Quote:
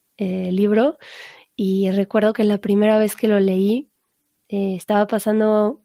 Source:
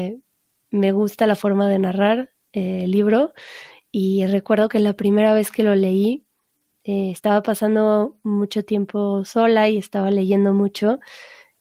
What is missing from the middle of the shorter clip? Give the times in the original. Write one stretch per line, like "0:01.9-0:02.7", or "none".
none